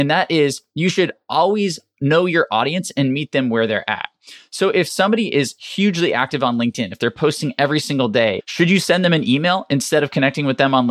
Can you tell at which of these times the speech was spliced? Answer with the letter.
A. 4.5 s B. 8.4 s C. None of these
B